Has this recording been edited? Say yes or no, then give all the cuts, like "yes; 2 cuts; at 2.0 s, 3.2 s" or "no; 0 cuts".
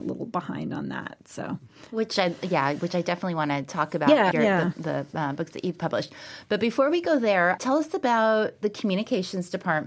yes; 2 cuts; at 4.3 s, 7.6 s